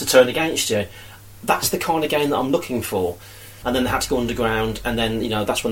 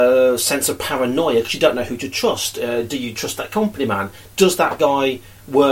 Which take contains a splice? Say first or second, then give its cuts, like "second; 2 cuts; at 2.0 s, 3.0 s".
first; 1 cut; at 3.6 s